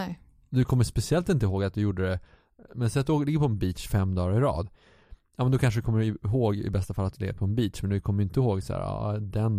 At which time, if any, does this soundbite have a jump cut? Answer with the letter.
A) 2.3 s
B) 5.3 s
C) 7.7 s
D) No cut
D